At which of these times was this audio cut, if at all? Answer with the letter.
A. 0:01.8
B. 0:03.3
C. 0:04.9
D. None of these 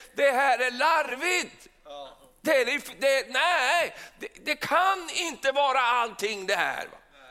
D